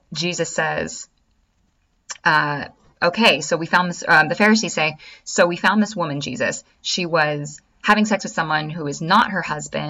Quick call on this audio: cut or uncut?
uncut